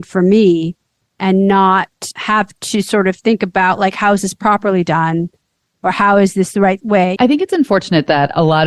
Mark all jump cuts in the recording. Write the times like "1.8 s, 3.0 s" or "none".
7.2 s